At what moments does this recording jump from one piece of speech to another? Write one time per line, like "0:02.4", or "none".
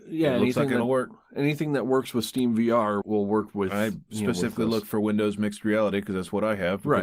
0:03.0